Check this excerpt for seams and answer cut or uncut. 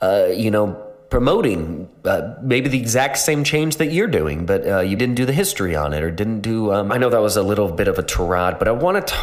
cut